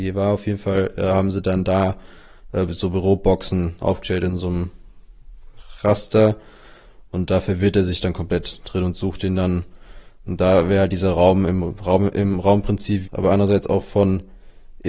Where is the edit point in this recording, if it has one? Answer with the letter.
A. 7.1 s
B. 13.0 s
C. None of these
B